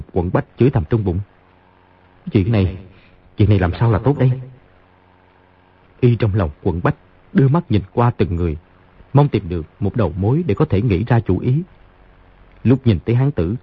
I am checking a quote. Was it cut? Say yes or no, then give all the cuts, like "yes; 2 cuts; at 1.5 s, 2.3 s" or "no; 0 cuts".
no; 0 cuts